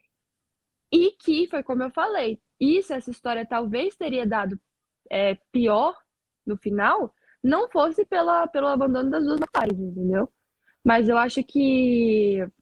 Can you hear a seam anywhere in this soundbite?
no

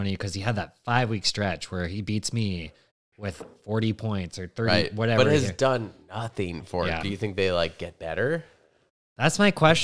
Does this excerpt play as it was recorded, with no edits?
no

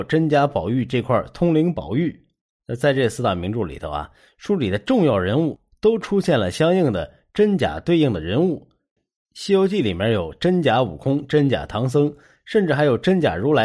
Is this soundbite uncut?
no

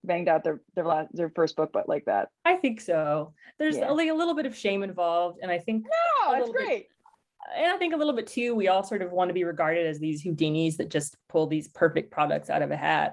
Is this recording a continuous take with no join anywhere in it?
no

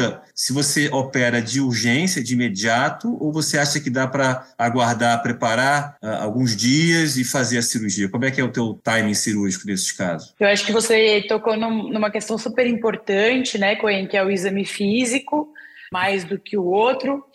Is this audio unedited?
no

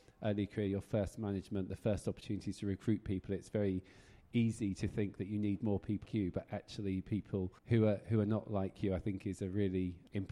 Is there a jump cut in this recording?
yes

